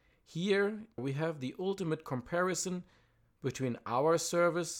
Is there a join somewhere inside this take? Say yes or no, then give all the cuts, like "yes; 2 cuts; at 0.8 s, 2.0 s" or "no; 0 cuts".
yes; 1 cut; at 1.0 s